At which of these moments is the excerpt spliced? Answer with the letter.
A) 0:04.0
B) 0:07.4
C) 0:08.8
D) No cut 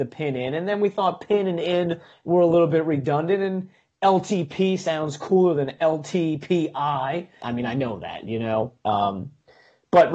B